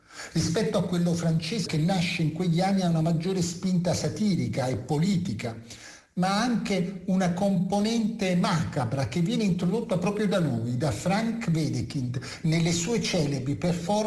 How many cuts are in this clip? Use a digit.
1